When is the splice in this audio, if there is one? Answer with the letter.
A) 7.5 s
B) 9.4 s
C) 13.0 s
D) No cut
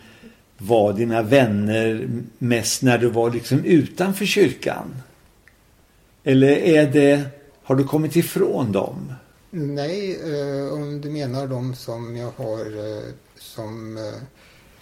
A